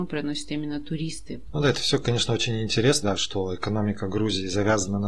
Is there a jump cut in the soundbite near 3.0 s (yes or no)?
yes